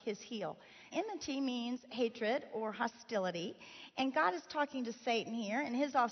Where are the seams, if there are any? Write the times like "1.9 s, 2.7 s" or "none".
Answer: 0.9 s

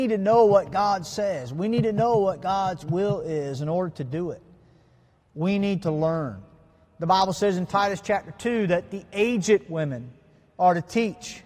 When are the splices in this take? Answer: none

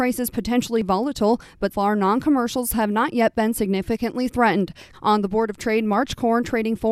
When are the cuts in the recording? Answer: 1.7 s, 4.9 s

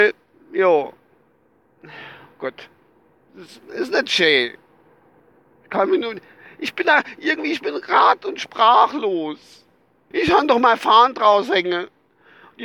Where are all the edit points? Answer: 10.1 s

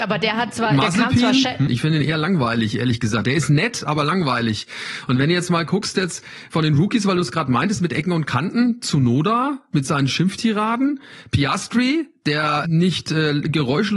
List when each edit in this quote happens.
1.7 s, 12.6 s

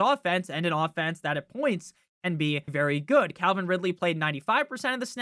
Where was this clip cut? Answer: 2.7 s

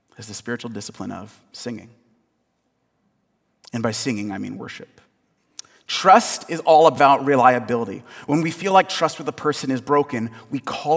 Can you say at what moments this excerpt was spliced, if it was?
none

